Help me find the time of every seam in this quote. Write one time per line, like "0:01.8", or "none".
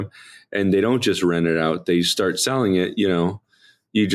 none